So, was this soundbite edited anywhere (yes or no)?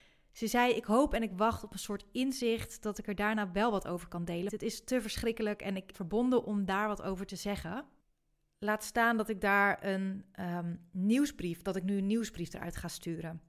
yes